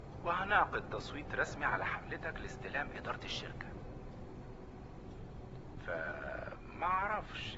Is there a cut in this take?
no; 0 cuts

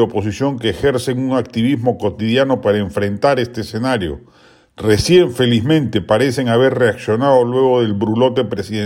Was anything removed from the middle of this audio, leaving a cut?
no; 0 cuts

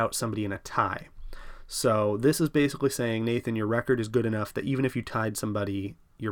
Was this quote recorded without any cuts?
yes; 0 cuts

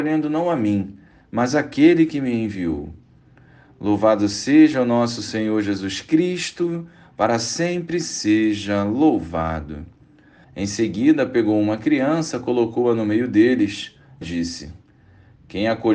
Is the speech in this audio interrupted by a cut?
yes; 2 cuts; at 10.4 s, 14.2 s

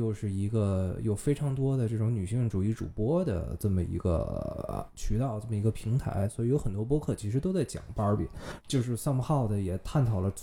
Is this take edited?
yes; 1 cut; at 8.6 s

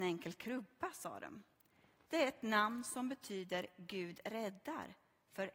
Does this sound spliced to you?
yes; 1 cut; at 2.1 s

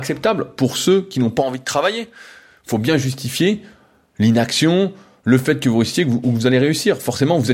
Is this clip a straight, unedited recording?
yes; 0 cuts

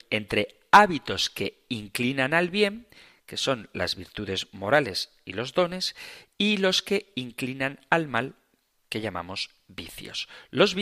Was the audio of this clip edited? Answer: no; 0 cuts

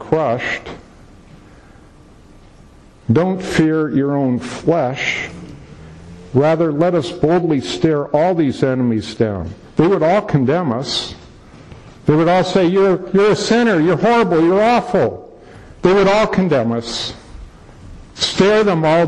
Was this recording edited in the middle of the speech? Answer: no; 0 cuts

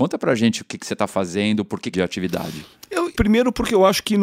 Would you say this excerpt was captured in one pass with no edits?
no; 2 cuts; at 1.9 s, 3.1 s

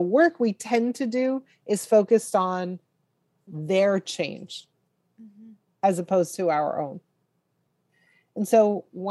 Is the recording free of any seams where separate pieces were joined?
yes; 0 cuts

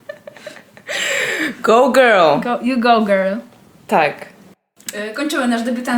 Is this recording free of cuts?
yes; 0 cuts

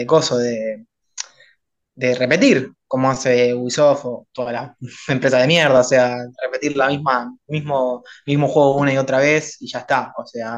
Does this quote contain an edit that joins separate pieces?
no; 0 cuts

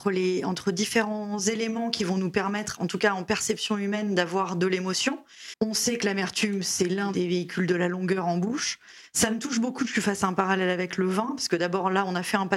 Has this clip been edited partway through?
yes; 1 cut; at 5.5 s

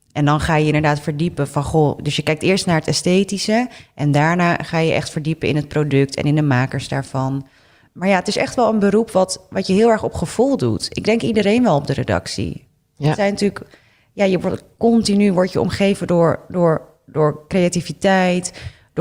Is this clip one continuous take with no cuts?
yes; 0 cuts

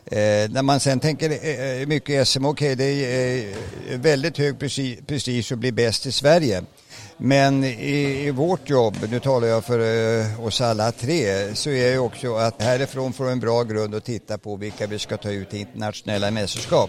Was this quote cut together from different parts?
yes; 1 cut; at 12.6 s

